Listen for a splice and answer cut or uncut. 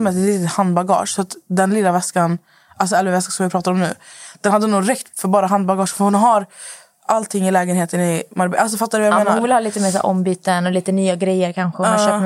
uncut